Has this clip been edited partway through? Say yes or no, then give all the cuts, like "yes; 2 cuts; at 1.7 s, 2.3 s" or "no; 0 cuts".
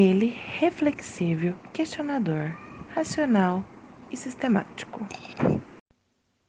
no; 0 cuts